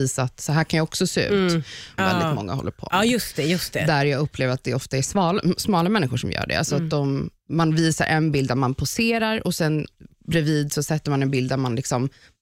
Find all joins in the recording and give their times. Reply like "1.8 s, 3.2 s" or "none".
2.0 s